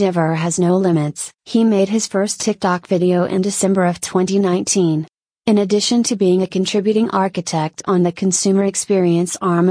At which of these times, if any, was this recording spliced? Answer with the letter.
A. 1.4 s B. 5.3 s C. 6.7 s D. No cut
A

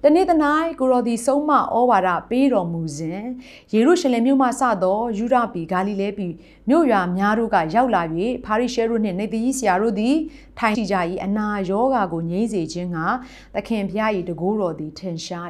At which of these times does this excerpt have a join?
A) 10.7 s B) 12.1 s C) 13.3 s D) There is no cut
A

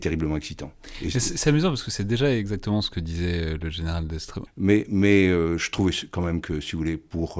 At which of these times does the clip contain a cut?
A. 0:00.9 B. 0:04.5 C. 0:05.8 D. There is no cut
B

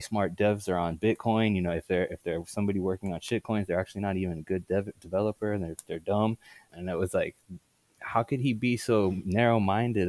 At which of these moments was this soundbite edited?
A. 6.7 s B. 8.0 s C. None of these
A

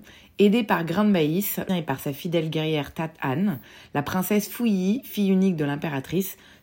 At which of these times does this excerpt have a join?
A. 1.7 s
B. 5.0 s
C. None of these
A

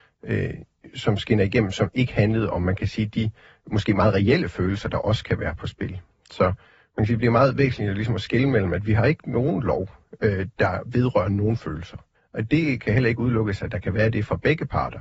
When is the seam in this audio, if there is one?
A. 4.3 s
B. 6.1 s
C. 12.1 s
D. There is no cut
C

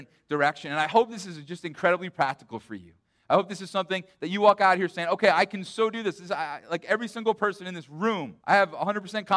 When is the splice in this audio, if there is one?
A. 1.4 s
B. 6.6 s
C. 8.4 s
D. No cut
C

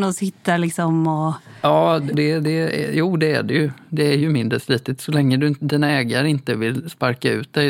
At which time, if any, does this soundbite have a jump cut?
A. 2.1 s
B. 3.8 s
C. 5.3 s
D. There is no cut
A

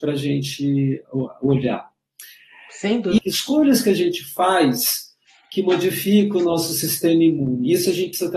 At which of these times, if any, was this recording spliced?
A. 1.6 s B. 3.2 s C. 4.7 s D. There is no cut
B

